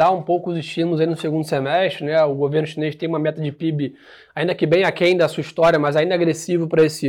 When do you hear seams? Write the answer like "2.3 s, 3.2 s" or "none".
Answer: none